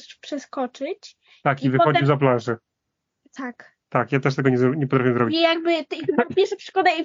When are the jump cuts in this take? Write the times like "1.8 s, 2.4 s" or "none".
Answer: none